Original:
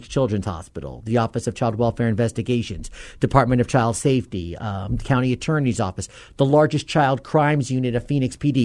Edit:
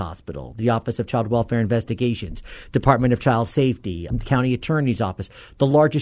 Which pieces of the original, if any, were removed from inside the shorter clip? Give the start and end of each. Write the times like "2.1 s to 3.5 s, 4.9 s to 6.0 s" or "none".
4.6 s to 4.9 s